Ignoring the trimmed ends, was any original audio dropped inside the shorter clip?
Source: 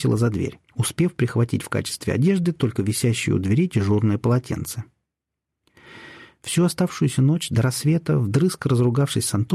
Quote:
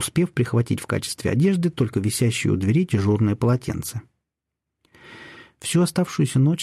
no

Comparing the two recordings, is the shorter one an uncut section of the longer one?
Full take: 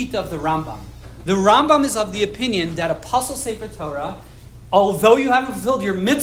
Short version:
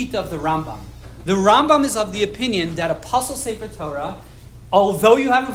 yes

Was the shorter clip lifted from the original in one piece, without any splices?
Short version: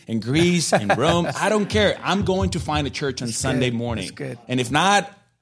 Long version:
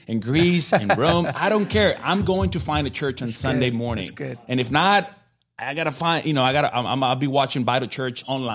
yes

